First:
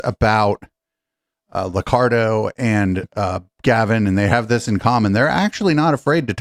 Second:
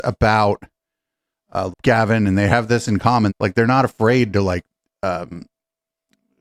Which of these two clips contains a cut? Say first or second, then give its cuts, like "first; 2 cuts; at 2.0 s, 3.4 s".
second; 2 cuts; at 1.7 s, 3.3 s